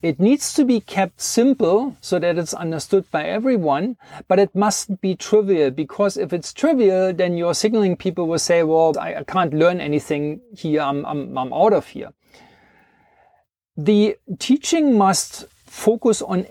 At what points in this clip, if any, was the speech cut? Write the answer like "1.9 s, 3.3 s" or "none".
8.9 s